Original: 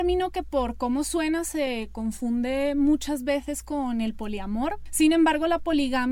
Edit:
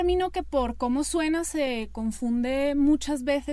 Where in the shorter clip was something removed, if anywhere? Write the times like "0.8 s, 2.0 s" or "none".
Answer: none